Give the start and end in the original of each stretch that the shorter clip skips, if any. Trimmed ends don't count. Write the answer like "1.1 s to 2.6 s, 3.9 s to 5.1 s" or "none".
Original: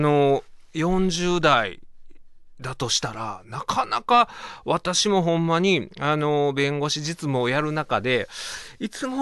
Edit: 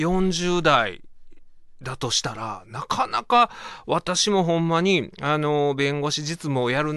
none